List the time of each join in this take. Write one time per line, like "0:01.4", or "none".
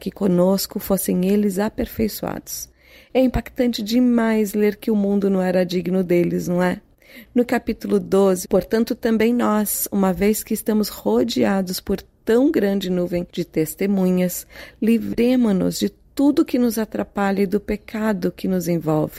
0:08.4